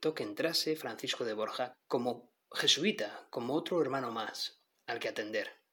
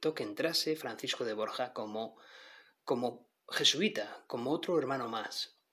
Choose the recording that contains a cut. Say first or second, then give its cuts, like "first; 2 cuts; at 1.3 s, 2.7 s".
first; 1 cut; at 1.7 s